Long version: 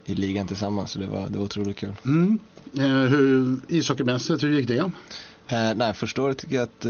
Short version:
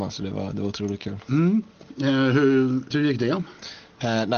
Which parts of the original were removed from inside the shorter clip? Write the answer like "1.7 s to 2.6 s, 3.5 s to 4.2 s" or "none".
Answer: 3.7 s to 4.4 s